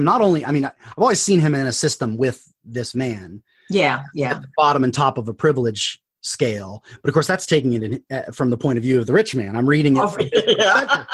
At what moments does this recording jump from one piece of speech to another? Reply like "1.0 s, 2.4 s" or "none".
none

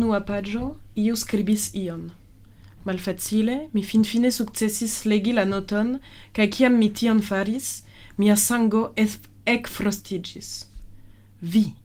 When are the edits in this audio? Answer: none

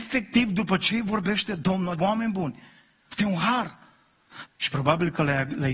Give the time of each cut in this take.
1.9 s, 4.5 s

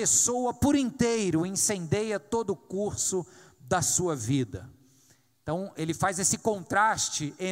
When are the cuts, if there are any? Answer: none

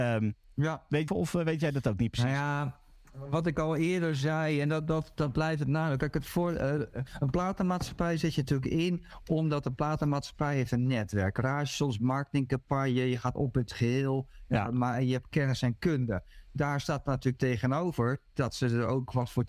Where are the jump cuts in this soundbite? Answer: 1.1 s

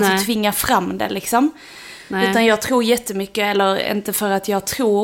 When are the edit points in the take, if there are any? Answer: none

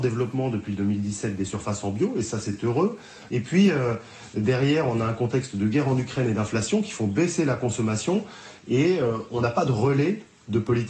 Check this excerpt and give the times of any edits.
3.3 s

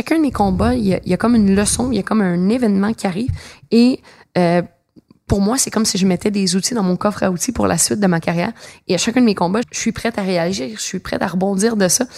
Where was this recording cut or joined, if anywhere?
9.6 s

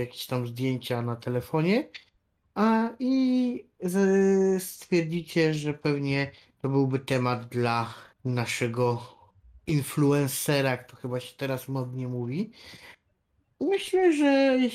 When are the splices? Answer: 8.1 s

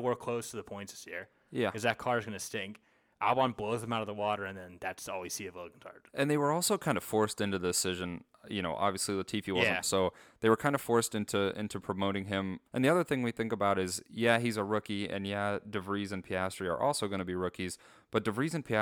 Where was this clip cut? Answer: 9.8 s, 12.7 s

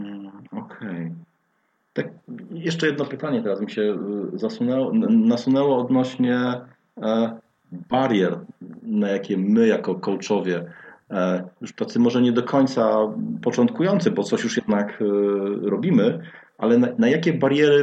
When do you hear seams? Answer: none

